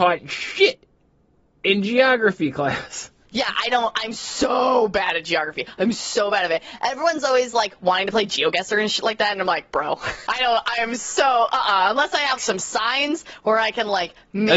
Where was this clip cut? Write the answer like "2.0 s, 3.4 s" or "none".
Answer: 10.3 s, 12.4 s